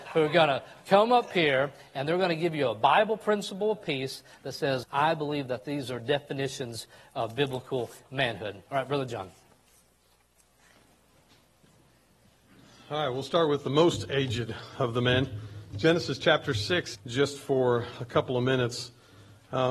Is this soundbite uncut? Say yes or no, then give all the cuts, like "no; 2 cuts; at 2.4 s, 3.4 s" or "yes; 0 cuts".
no; 2 cuts; at 4.8 s, 16.9 s